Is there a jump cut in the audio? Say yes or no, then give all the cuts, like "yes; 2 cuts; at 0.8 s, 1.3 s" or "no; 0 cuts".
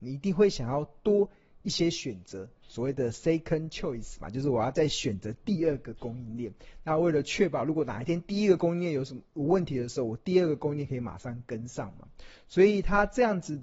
no; 0 cuts